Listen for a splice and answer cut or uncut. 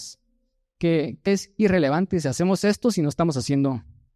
cut